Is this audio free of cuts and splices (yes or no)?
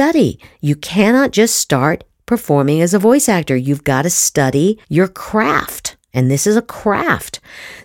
no